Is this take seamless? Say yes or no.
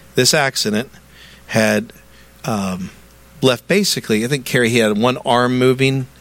yes